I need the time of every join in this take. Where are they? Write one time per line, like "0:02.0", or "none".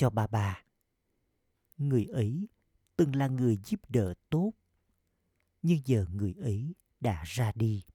0:01.7